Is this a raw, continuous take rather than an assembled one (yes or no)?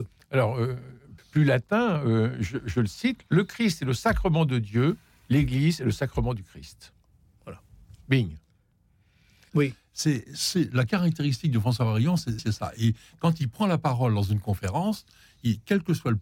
no